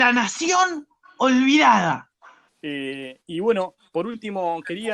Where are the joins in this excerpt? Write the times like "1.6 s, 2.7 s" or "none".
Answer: 2.5 s